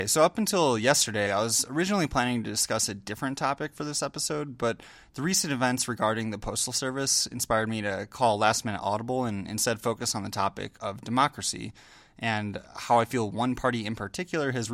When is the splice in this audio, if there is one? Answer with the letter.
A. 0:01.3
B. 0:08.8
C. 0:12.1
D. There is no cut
A